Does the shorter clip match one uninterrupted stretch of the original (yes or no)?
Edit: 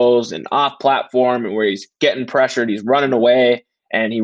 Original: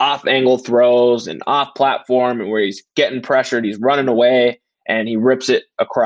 yes